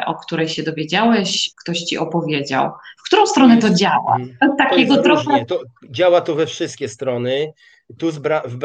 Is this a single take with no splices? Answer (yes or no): no